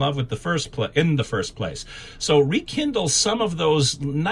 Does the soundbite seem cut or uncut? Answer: uncut